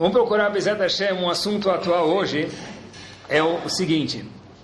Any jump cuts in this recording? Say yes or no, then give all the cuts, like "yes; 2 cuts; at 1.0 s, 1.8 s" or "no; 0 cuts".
no; 0 cuts